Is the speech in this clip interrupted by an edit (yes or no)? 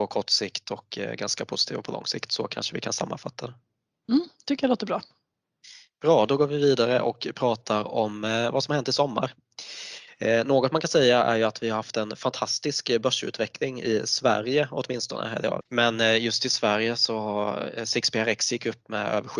yes